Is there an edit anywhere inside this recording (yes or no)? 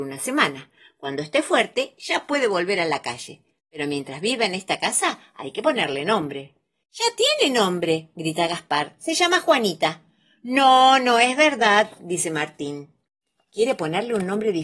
no